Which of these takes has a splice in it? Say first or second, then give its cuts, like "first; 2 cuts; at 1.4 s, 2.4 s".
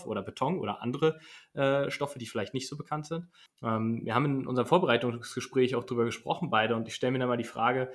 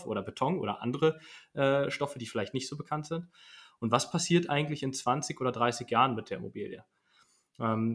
first; 1 cut; at 3.5 s